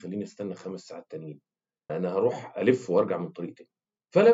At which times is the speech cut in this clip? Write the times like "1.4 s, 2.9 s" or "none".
1.9 s